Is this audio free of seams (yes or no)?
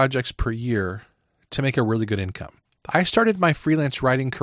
no